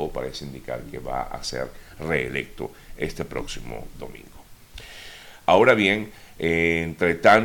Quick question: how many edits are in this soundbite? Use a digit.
1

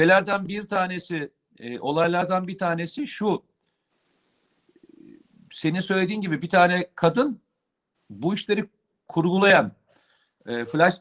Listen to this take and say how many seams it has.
0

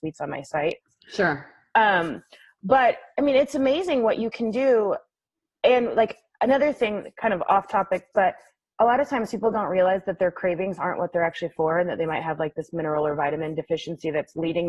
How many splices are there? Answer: 0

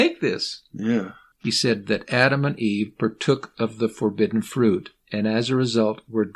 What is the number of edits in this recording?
1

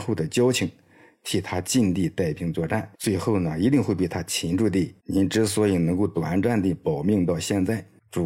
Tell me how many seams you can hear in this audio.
2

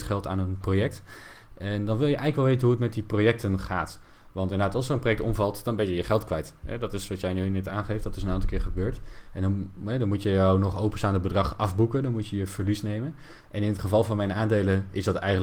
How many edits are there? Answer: 0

